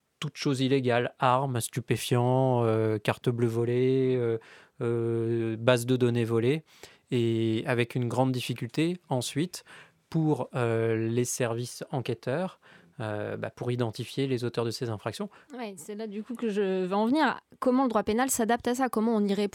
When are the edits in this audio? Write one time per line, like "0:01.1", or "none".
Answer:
0:15.5